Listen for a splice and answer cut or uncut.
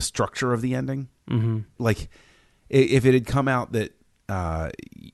cut